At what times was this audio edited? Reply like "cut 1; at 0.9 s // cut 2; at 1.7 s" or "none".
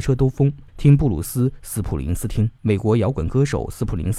cut 1; at 2.6 s